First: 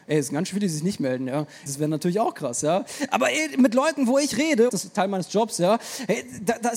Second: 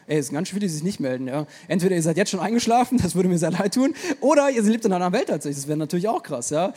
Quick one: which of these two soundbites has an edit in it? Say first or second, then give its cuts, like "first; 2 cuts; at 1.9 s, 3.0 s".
first; 2 cuts; at 1.7 s, 4.7 s